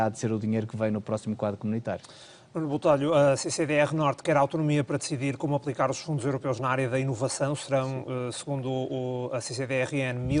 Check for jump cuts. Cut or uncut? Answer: uncut